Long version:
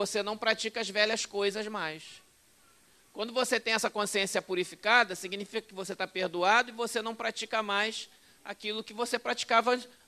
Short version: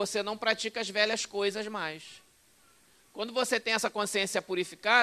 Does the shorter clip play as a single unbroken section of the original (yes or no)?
yes